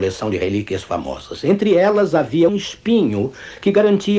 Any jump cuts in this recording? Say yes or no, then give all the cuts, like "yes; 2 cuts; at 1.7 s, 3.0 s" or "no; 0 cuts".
yes; 1 cut; at 2.5 s